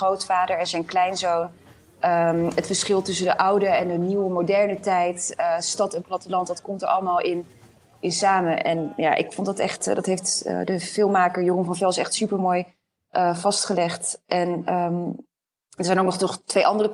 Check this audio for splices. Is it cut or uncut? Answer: uncut